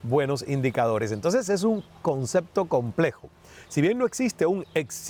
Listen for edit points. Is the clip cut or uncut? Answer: uncut